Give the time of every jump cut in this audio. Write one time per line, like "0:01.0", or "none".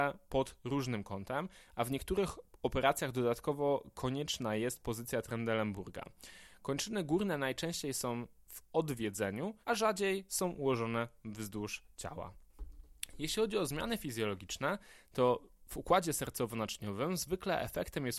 0:09.6